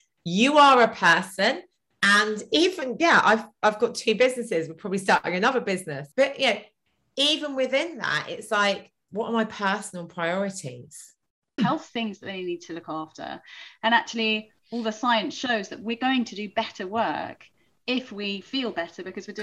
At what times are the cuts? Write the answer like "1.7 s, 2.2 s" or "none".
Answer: 11.6 s